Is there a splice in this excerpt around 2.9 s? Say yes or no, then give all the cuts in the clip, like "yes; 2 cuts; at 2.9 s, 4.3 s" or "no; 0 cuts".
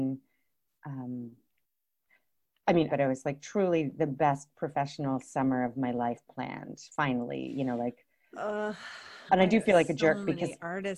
yes; 1 cut; at 2.9 s